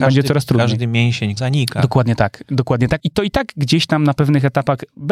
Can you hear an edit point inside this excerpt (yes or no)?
yes